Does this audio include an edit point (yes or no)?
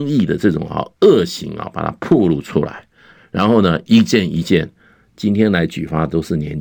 no